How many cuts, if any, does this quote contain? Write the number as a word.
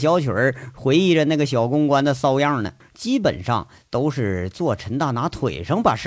one